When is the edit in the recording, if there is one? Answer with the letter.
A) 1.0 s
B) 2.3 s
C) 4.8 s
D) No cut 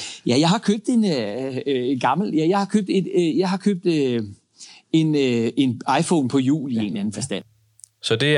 D